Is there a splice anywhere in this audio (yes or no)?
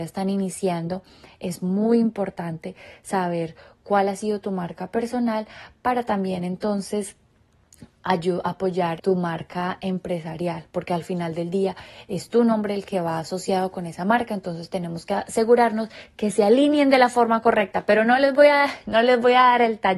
yes